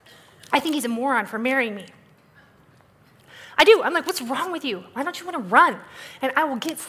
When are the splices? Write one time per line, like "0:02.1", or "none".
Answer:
none